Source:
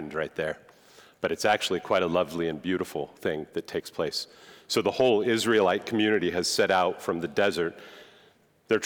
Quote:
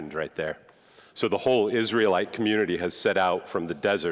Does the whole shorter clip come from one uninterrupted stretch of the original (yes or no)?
no